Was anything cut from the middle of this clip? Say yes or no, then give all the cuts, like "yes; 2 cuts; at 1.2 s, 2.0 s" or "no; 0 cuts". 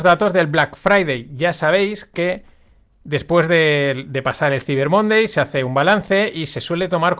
no; 0 cuts